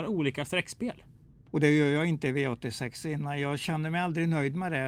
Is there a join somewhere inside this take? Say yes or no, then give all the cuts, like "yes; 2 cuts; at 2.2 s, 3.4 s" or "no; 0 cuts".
yes; 1 cut; at 1.5 s